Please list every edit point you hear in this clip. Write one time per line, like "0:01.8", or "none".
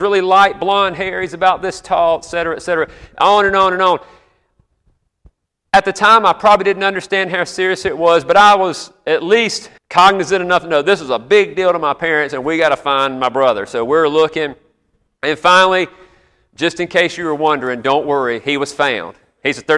0:09.8